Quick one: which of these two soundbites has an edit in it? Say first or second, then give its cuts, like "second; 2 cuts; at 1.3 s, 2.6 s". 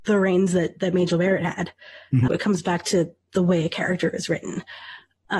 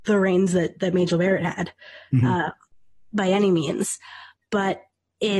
first; 1 cut; at 2.3 s